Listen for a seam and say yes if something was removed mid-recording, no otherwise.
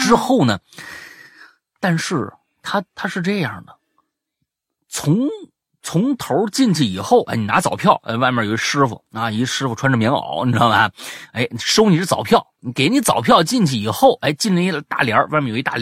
no